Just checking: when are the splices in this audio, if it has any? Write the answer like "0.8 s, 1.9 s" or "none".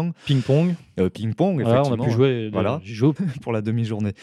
3.2 s